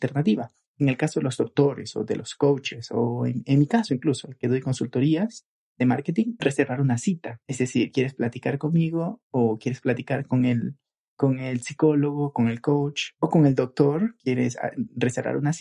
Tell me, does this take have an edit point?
yes; 1 cut; at 6.4 s

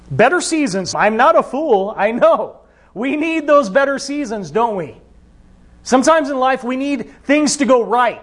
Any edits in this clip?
yes; 1 cut; at 0.9 s

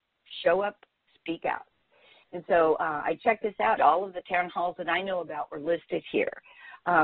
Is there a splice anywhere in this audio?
yes; 1 cut; at 3.8 s

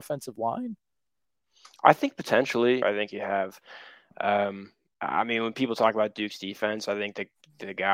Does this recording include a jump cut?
yes; 1 cut; at 2.8 s

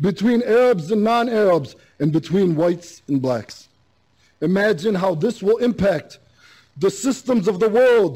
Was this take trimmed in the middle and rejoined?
no; 0 cuts

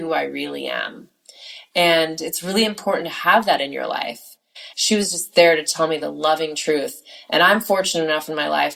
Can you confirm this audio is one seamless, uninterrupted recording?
no; 1 cut; at 4.7 s

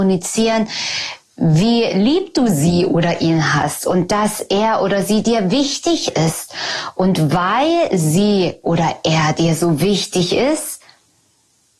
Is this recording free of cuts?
yes; 0 cuts

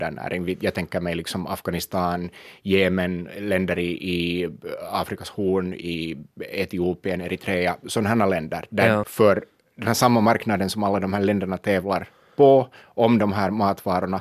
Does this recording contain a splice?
yes; 1 cut; at 9.0 s

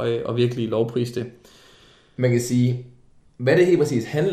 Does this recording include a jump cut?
no; 0 cuts

